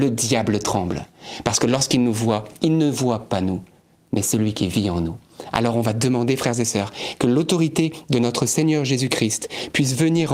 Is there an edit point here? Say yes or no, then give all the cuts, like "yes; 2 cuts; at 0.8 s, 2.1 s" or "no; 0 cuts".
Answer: no; 0 cuts